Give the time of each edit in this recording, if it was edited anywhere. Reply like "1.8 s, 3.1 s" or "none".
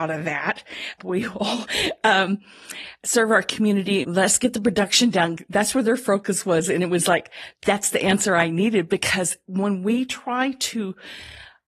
1.0 s, 4.0 s, 7.5 s